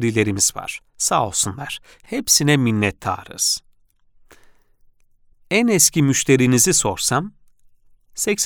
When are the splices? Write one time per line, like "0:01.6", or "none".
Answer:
0:01.9